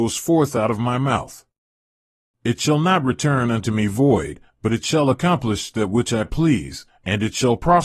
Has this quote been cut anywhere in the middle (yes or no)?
no